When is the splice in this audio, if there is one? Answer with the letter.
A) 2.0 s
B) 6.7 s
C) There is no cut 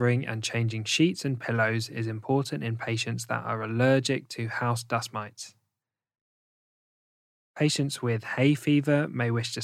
C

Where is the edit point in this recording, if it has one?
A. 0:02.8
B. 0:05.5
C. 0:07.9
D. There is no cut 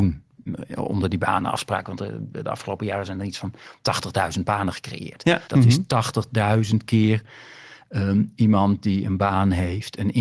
B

